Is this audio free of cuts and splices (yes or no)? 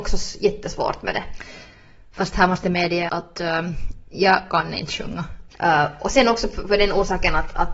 no